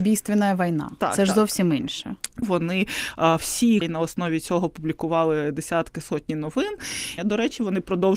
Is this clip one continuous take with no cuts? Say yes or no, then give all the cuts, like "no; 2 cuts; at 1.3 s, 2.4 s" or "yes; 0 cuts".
no; 3 cuts; at 2.4 s, 3.8 s, 7.2 s